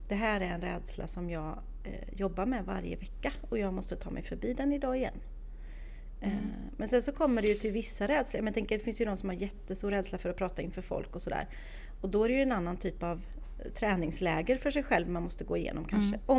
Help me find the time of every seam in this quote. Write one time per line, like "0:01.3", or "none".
none